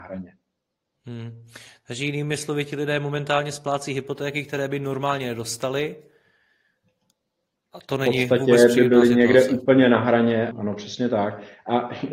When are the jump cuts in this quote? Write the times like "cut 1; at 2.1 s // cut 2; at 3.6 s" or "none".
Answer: cut 1; at 10.5 s